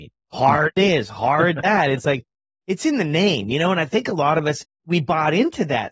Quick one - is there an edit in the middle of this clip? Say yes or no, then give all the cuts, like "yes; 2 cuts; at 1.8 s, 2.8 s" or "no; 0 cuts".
no; 0 cuts